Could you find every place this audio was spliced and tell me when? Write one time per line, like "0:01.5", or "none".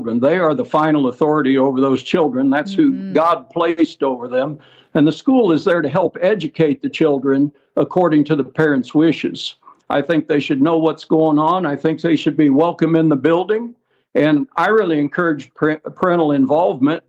0:09.8